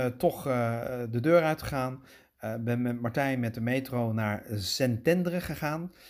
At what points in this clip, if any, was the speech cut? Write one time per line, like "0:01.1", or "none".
none